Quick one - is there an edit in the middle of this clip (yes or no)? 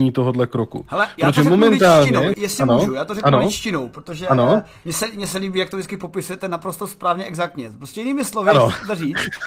yes